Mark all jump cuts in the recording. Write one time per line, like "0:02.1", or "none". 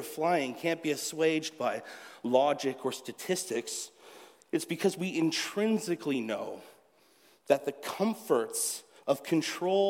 none